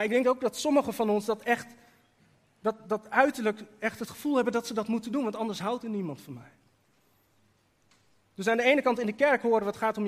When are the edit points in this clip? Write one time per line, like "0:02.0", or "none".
none